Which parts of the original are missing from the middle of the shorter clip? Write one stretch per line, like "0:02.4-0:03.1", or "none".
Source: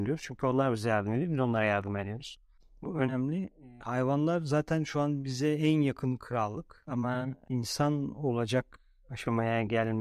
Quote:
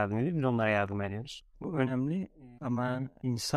0:02.5-0:02.7
0:03.8-0:06.8